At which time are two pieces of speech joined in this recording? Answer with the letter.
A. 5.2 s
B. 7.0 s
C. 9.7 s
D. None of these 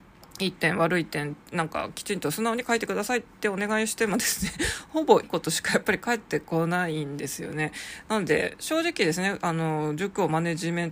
A